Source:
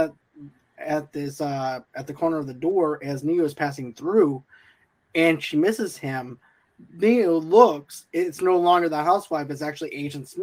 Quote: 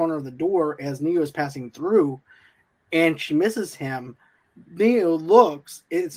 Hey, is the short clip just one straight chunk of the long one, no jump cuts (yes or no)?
yes